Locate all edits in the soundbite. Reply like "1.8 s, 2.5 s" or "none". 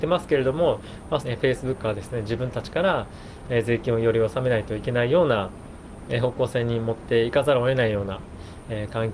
1.2 s